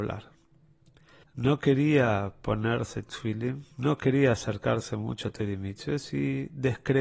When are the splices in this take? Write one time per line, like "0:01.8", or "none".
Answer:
0:01.2
0:03.7